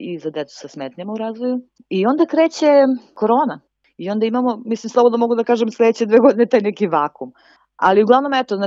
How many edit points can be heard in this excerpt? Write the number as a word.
zero